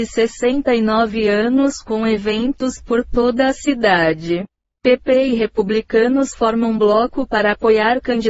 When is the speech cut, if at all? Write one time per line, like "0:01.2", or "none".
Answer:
0:04.7

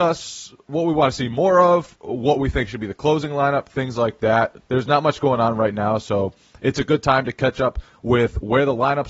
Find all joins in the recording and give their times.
0:04.6

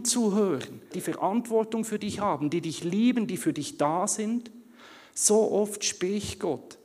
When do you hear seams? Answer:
0:00.9

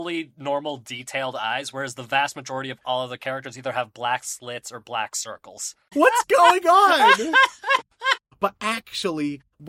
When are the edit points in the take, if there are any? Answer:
0:05.9
0:08.3

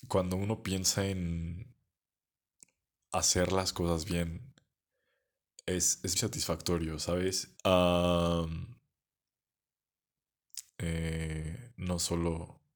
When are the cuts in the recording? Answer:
0:06.2
0:07.6
0:10.8

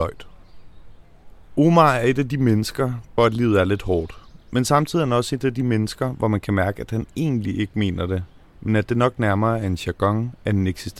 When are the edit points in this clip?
0:03.2

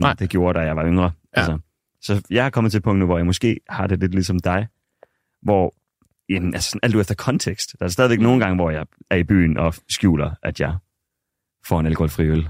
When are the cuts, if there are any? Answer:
none

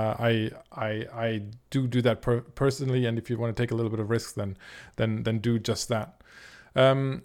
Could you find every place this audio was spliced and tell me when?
none

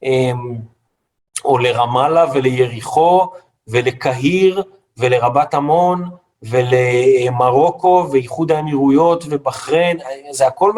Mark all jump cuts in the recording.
none

